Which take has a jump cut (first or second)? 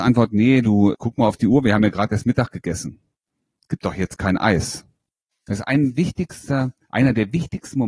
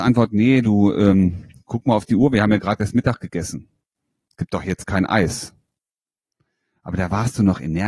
first